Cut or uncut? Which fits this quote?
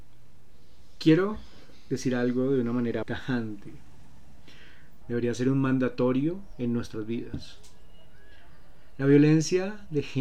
cut